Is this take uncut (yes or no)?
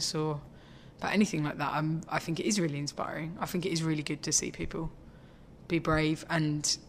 yes